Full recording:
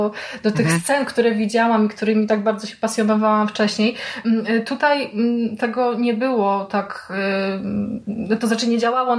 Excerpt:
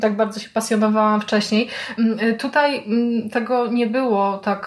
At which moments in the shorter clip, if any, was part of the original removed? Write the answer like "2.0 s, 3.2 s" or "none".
none